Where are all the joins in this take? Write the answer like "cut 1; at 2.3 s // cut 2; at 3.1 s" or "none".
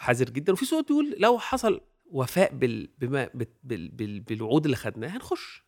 none